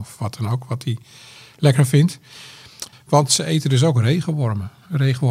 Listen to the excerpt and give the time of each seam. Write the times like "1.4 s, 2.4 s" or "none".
2.9 s